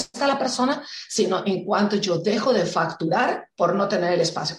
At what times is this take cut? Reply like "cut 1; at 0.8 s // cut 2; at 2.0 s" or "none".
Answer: cut 1; at 3.5 s